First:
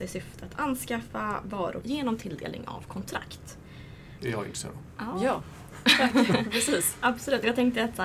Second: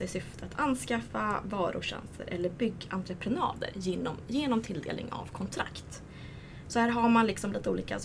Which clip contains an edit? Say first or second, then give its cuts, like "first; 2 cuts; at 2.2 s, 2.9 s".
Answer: first; 2 cuts; at 1.8 s, 4.2 s